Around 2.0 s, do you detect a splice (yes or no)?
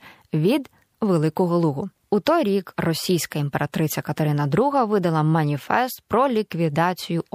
yes